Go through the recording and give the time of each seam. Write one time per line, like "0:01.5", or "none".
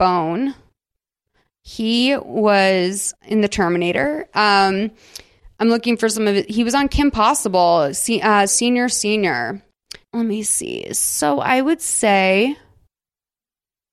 0:08.5
0:10.1